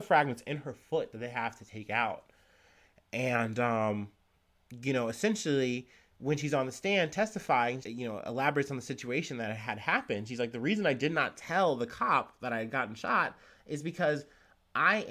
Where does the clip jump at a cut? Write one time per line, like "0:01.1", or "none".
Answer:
0:07.8